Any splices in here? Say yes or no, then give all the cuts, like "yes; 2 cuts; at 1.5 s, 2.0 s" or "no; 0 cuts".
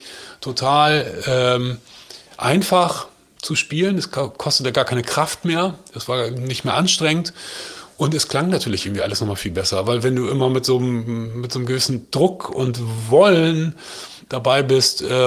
no; 0 cuts